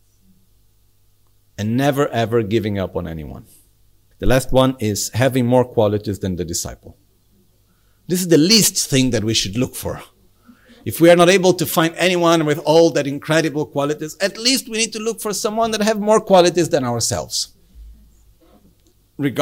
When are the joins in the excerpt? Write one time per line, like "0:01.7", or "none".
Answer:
0:04.1

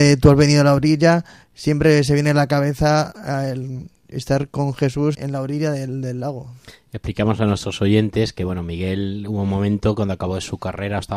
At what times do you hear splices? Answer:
0:05.1

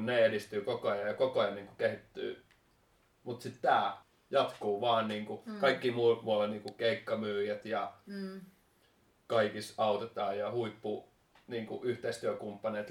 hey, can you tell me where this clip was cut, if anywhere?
none

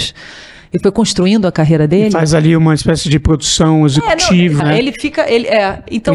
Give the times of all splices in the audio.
0:04.6

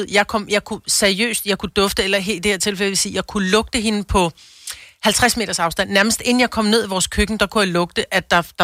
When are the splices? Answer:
none

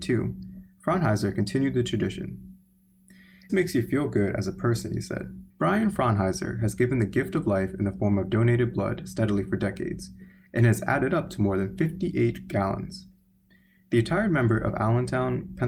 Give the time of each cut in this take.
0:03.5
0:05.5

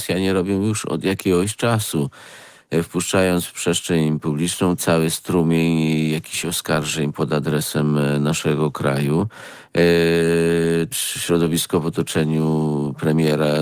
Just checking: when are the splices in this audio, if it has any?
0:04.8
0:10.9

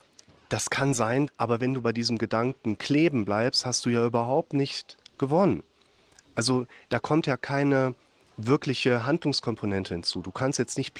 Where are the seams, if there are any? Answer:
0:01.3

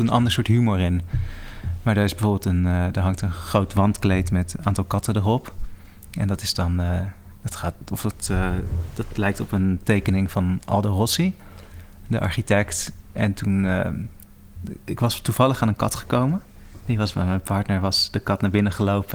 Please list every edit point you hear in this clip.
none

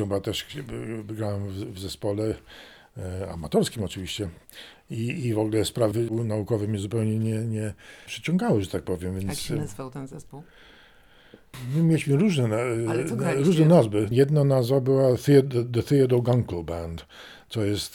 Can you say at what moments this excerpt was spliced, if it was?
0:14.1

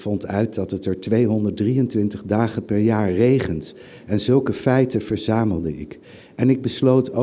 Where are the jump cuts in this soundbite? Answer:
none

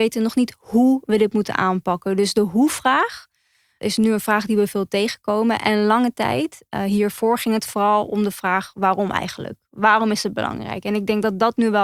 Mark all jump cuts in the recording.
none

